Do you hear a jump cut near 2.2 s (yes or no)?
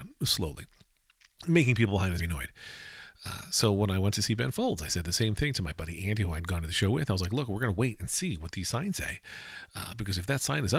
yes